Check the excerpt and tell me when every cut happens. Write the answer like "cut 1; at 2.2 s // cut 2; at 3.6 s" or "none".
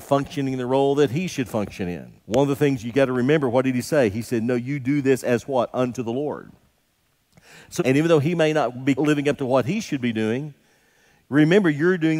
cut 1; at 2.2 s // cut 2; at 7.8 s // cut 3; at 9.0 s